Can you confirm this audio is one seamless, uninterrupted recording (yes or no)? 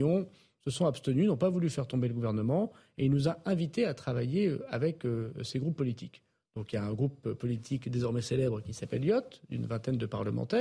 yes